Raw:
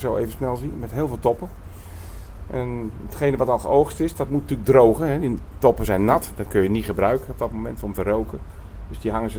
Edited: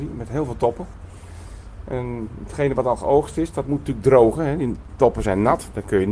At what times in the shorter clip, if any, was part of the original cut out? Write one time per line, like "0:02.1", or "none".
none